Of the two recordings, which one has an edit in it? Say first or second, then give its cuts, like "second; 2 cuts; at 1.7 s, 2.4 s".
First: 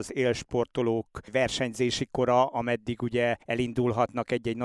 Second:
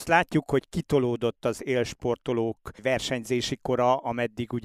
first; 1 cut; at 3.4 s